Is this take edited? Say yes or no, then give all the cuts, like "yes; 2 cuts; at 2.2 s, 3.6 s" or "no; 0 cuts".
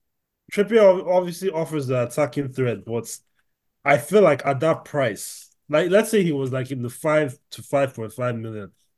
no; 0 cuts